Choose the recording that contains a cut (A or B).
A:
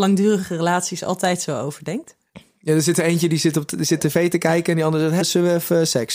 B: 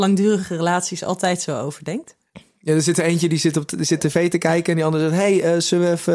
A